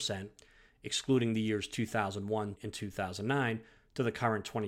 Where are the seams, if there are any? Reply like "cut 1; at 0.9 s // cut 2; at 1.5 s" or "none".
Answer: cut 1; at 2.6 s

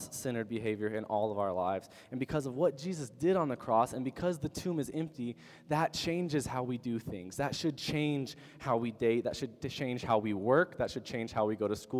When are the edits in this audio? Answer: none

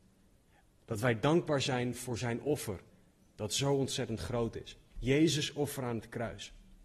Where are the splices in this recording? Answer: cut 1; at 4.9 s

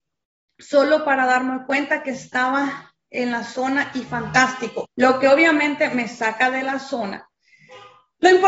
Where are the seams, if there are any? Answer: cut 1; at 4.8 s

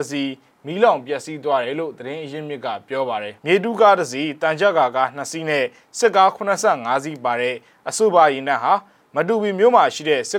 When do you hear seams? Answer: cut 1; at 3.4 s

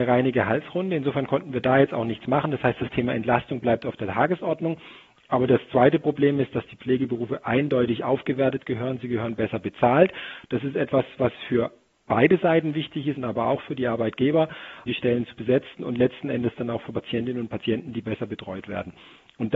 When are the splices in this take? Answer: cut 1; at 13.2 s // cut 2; at 14.9 s

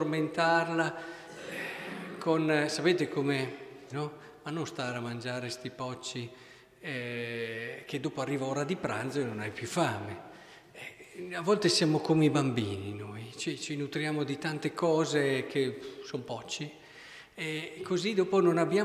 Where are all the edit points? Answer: cut 1; at 3.9 s // cut 2; at 17.8 s

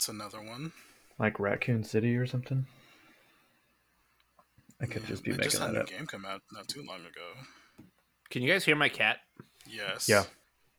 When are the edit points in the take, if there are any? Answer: none

